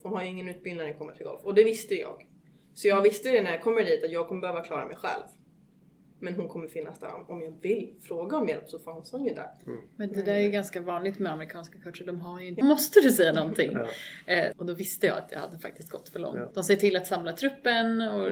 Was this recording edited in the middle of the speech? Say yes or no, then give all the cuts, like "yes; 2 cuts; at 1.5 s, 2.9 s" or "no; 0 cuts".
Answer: yes; 3 cuts; at 12.6 s, 14.5 s, 16.5 s